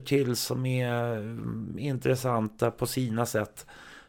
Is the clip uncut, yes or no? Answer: yes